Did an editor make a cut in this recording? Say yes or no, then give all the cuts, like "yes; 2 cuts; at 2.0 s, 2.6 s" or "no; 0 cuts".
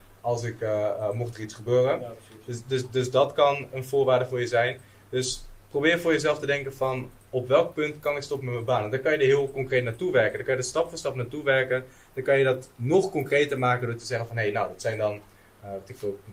no; 0 cuts